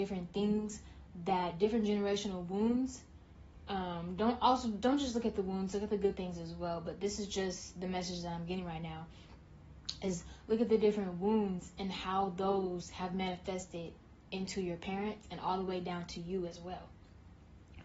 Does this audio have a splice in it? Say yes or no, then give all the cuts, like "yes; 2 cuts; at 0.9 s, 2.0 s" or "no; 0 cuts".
no; 0 cuts